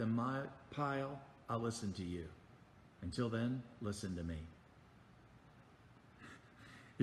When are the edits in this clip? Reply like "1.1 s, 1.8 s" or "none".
5.7 s